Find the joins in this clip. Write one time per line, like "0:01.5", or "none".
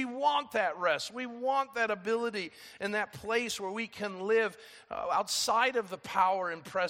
none